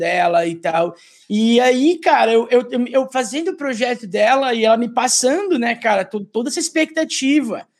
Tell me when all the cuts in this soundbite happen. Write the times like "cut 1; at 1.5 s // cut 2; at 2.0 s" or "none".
none